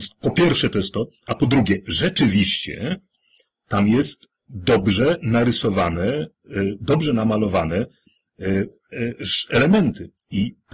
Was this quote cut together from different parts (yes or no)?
no